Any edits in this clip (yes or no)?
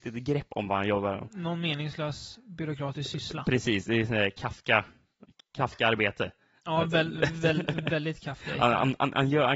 no